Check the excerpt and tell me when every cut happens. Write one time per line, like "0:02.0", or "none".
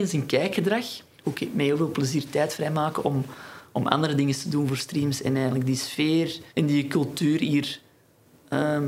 0:01.2
0:06.5